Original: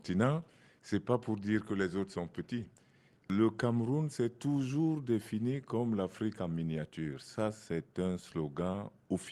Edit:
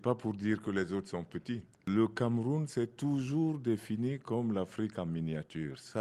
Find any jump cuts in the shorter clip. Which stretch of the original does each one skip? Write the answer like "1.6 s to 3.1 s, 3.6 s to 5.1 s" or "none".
2.8 s to 3.2 s